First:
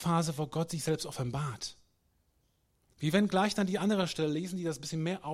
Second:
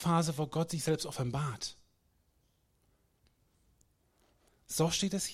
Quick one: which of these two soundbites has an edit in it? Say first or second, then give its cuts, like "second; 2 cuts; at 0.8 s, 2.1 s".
first; 1 cut; at 2.9 s